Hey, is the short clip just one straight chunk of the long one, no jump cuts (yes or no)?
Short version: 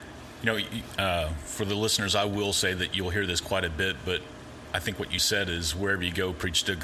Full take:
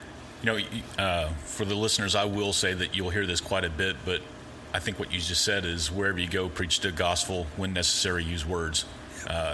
no